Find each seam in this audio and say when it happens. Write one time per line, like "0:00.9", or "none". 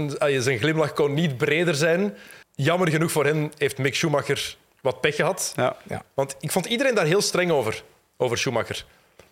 0:02.4
0:08.0